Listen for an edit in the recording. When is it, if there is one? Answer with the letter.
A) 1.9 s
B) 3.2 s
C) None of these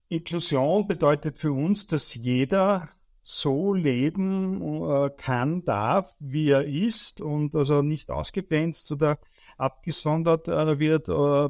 C